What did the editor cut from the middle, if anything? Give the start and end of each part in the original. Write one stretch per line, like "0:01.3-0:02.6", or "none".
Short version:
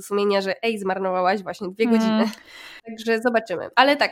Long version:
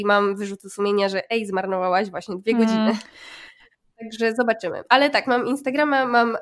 0:03.5-0:03.9